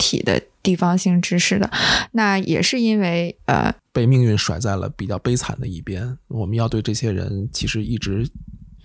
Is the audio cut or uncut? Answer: cut